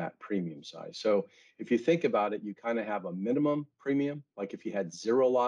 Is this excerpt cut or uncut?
uncut